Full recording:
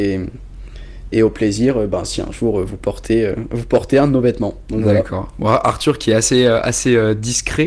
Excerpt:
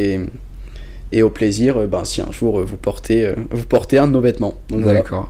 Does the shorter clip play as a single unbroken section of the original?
yes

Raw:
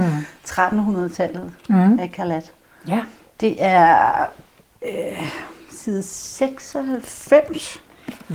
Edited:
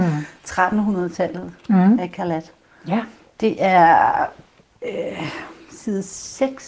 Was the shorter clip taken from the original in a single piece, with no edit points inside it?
yes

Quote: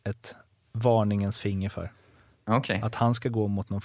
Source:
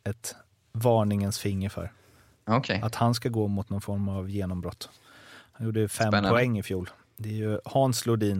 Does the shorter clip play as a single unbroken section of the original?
yes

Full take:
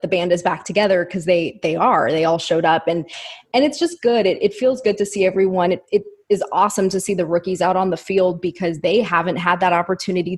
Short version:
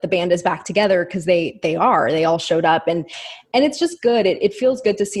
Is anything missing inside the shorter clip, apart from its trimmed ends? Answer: no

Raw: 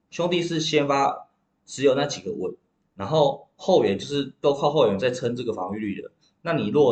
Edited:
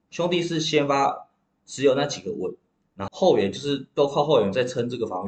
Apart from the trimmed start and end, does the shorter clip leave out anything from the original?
yes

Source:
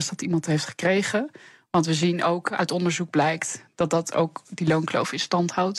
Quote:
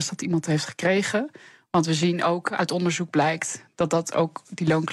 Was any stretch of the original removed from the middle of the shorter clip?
no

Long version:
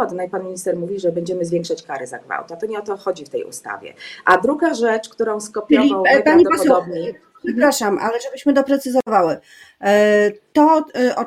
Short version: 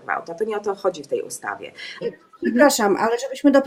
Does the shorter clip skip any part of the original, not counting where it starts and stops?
yes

